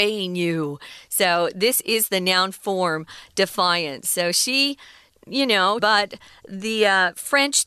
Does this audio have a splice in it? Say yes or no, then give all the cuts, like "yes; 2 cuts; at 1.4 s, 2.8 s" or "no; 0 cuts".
yes; 1 cut; at 5.8 s